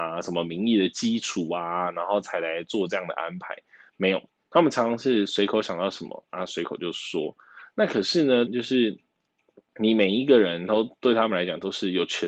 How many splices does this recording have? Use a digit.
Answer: 1